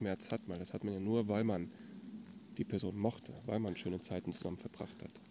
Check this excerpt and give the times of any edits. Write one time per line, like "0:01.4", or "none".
none